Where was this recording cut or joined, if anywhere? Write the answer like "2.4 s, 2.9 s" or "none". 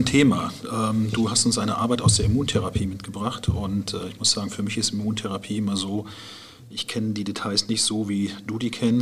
none

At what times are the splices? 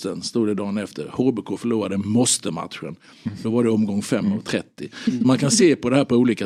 none

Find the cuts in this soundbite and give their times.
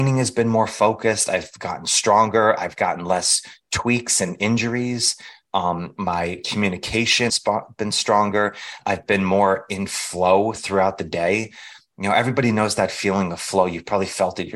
7.3 s

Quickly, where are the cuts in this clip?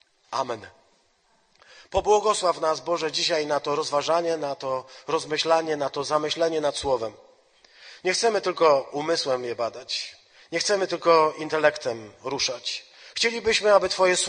none

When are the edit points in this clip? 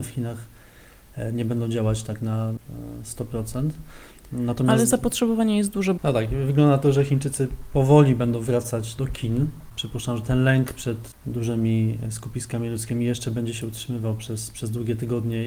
6.0 s, 9.0 s

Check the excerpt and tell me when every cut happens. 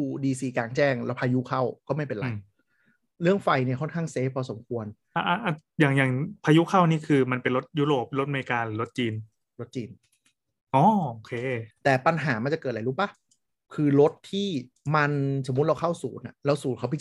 none

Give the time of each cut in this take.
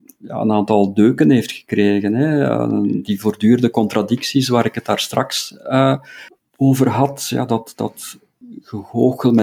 none

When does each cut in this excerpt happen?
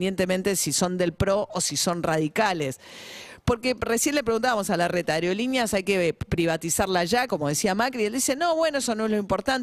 none

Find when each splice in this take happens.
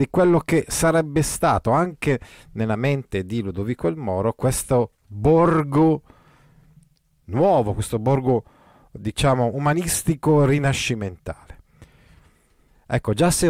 none

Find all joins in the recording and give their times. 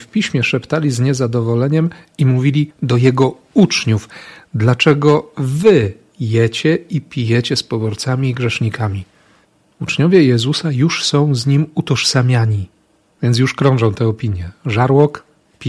13.1 s

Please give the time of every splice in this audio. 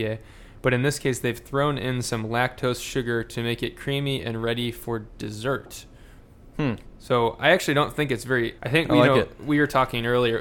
8.6 s

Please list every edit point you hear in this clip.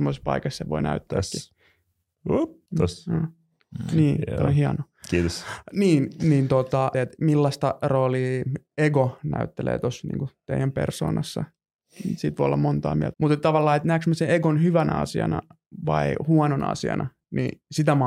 2.7 s, 6.9 s, 13.1 s

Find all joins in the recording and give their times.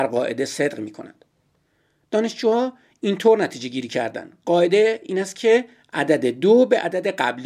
none

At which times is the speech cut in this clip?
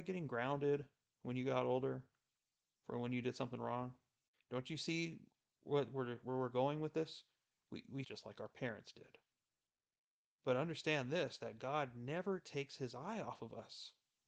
4.3 s, 8.0 s, 10.3 s

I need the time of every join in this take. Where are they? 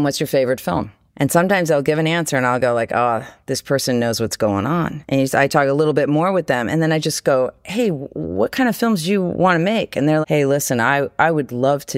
10.2 s

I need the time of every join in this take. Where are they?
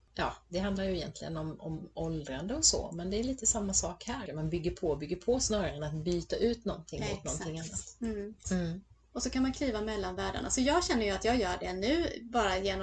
4.3 s, 8.4 s

